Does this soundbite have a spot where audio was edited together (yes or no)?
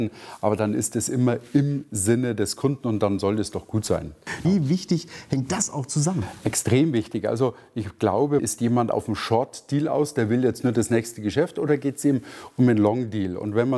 yes